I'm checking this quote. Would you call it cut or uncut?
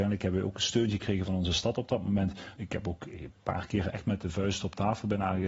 cut